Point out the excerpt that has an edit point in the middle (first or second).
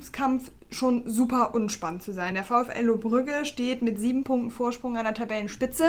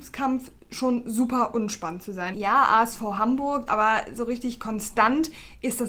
second